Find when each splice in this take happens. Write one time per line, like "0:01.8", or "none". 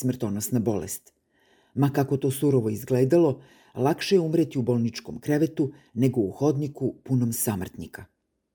none